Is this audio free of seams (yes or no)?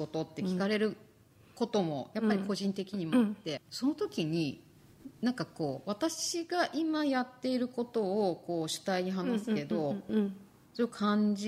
no